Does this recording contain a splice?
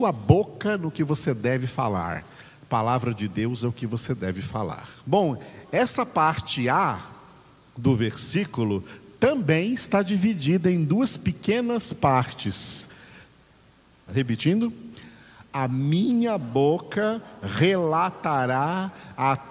yes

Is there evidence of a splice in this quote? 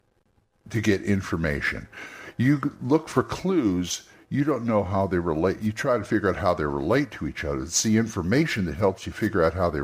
no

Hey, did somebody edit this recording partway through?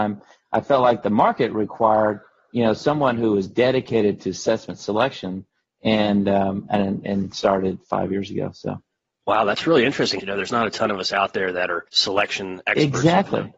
yes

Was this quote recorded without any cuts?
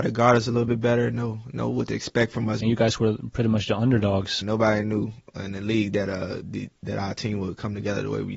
no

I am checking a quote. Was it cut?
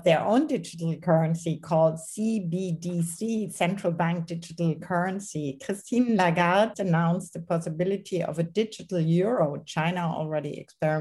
yes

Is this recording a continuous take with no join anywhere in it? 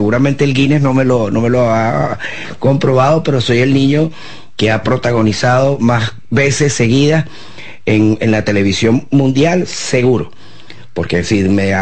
yes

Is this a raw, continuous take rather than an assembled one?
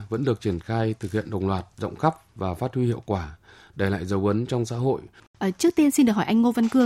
no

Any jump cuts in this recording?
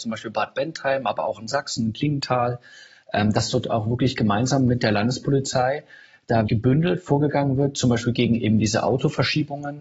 yes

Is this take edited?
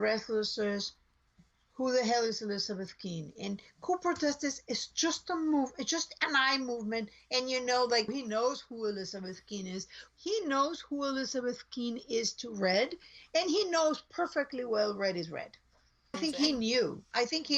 yes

